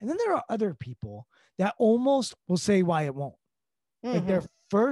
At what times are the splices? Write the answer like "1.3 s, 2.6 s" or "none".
2.4 s

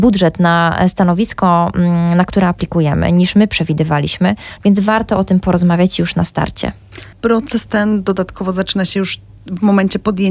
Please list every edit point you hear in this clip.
4.6 s, 7.1 s

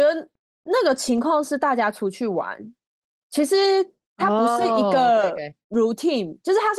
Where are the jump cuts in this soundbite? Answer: none

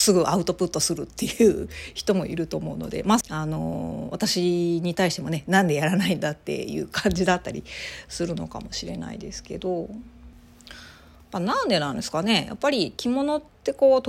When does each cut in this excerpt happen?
3.2 s

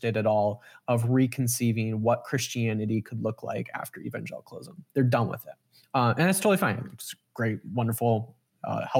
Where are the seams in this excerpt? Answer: none

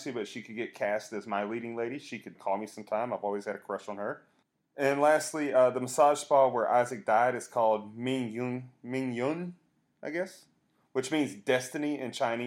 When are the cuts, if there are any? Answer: 2.4 s

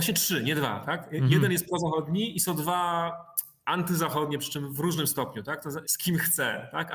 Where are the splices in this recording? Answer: 5.8 s

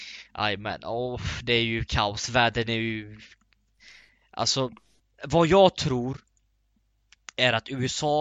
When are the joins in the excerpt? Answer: none

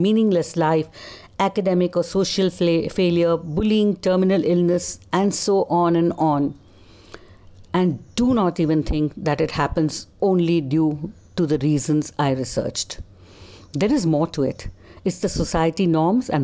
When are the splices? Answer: none

